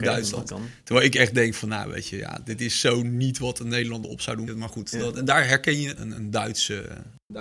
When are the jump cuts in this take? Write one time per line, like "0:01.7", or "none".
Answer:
0:04.5
0:06.0